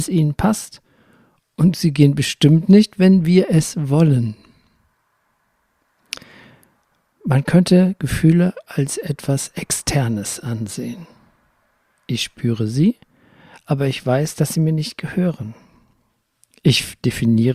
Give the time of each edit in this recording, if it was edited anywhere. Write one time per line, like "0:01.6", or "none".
none